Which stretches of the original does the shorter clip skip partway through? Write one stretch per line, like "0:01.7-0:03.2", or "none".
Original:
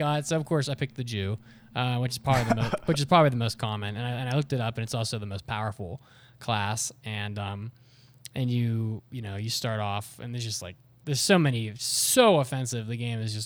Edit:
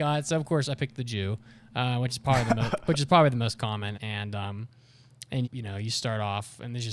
0:03.9-0:07.0
0:08.5-0:09.0